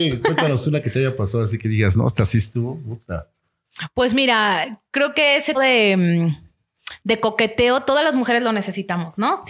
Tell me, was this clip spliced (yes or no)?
yes